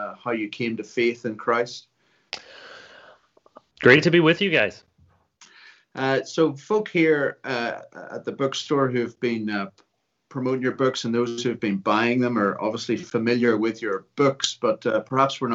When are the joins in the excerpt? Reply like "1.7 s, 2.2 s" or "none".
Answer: 3.7 s